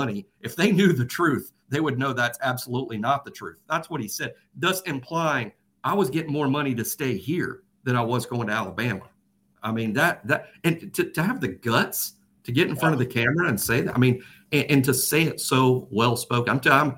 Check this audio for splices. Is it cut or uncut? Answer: uncut